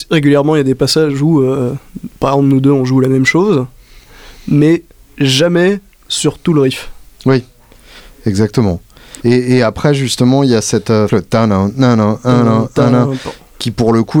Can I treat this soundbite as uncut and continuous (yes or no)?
no